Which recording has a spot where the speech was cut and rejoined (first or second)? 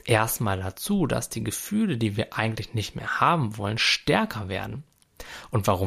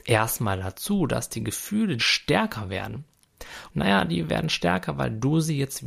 second